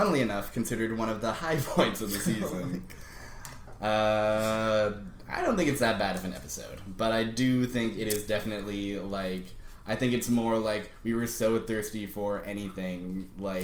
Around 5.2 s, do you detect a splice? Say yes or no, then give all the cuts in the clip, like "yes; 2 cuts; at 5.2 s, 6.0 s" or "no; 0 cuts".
no; 0 cuts